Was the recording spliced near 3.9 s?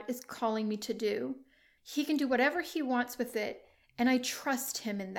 no; 1 cut; at 1.8 s

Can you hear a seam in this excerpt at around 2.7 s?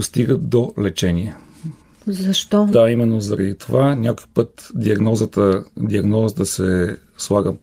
yes; 1 cut; at 2.7 s

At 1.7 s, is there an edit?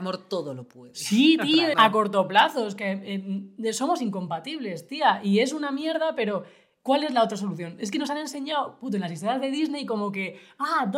yes; 1 cut; at 1.7 s

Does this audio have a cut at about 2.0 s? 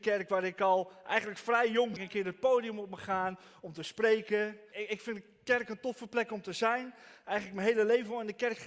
yes; 2 cuts; at 2.0 s, 4.7 s

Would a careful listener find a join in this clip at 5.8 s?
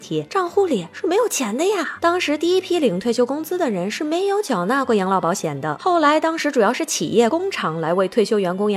yes; 1 cut; at 5.8 s

